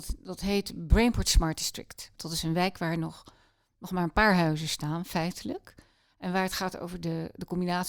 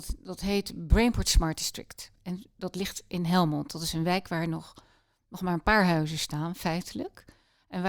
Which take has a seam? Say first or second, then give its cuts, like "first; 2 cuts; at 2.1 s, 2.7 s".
first; 1 cut; at 2.2 s